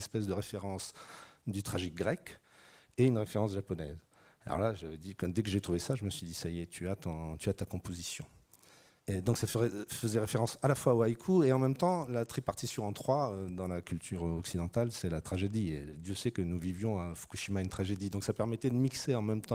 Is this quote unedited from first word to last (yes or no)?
no